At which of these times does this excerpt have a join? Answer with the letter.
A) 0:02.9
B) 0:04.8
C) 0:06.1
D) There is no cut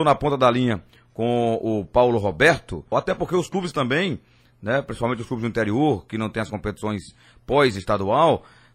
A